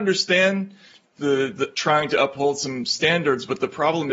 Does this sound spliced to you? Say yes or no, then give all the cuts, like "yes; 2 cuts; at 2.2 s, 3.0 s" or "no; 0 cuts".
yes; 1 cut; at 1.7 s